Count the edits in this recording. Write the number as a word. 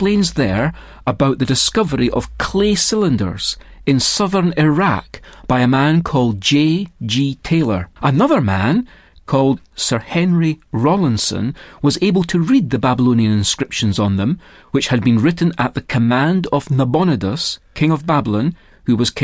one